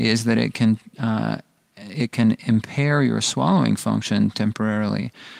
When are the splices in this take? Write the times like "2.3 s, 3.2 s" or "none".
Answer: none